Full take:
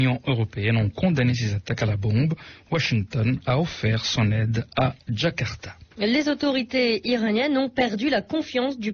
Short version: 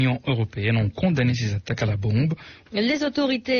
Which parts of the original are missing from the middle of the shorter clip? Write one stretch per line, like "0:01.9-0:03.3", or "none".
0:02.6-0:05.9